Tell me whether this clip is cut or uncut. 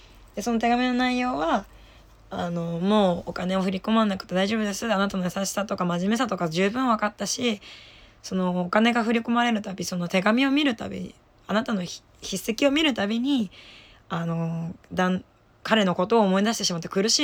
uncut